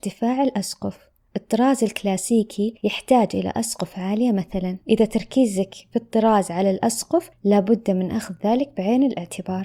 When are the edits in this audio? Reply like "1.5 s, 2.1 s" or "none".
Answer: 4.8 s